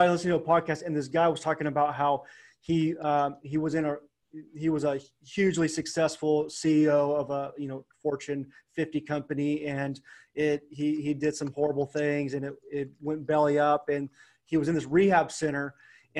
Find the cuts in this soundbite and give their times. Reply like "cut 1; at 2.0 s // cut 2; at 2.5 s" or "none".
none